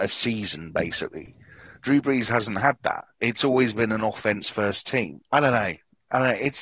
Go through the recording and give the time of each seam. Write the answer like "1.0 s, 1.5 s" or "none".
5.2 s